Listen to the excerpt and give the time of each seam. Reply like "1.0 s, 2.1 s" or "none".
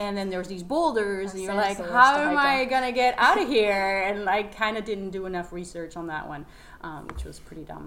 none